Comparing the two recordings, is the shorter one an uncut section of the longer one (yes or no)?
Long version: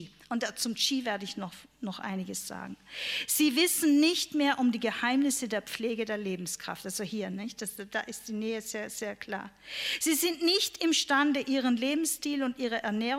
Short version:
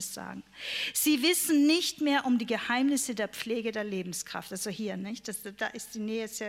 yes